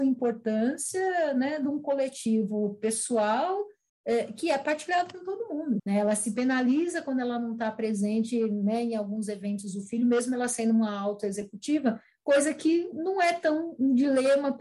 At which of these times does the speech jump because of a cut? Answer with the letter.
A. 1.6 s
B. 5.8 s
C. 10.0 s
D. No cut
B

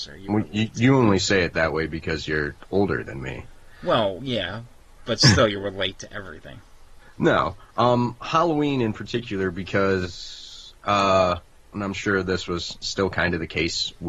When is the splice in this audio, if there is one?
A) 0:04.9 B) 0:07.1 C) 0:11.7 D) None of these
C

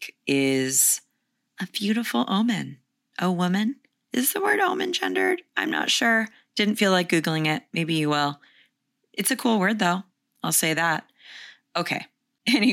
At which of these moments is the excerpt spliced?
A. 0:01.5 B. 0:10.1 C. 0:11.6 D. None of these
D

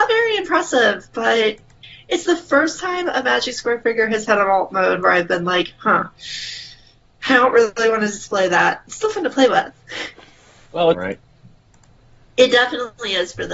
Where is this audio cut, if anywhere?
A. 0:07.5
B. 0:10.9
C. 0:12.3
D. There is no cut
B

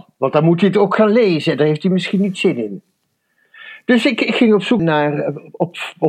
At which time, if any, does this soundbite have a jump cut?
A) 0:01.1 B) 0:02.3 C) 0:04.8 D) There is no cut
C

